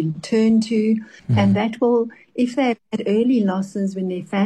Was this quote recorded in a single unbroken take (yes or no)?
no